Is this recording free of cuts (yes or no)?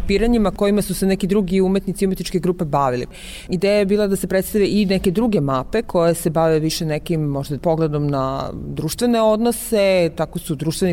no